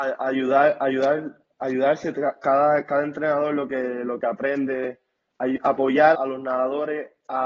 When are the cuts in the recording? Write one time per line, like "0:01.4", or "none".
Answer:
0:06.1

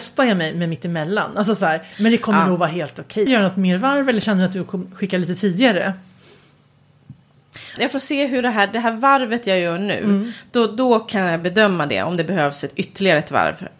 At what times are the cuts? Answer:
0:03.3
0:07.8

